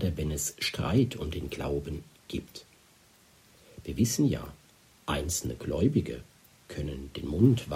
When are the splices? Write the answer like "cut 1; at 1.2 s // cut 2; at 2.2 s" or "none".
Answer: none